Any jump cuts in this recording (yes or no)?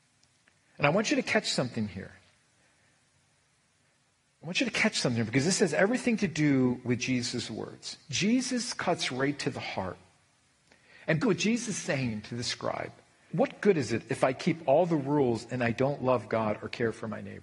yes